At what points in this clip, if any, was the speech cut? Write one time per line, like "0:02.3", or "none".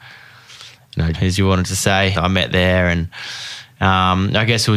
0:01.1
0:02.1